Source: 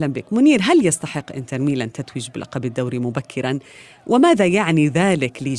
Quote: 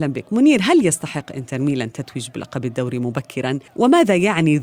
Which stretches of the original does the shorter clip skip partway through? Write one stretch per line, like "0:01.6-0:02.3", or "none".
0:03.7-0:04.0